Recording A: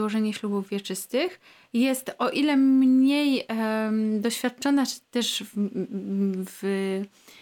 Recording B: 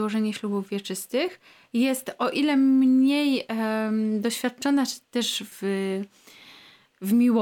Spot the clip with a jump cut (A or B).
B